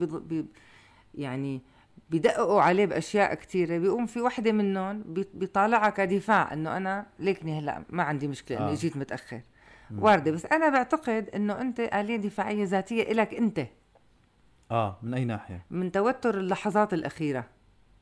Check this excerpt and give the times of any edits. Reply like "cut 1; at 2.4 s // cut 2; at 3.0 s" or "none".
none